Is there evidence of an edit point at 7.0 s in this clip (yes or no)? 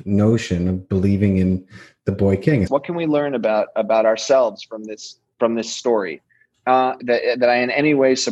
yes